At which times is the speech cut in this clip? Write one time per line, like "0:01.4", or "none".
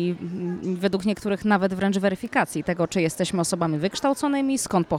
none